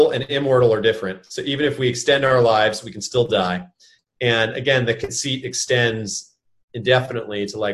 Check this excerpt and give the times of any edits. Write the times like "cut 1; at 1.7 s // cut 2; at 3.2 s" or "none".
cut 1; at 4.0 s